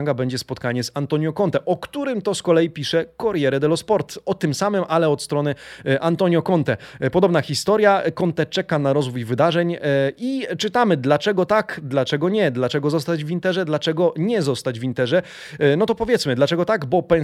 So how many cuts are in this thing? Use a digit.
0